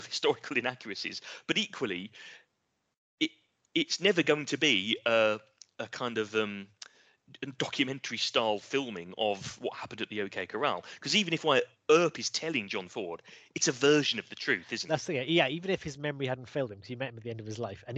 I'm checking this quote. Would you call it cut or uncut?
uncut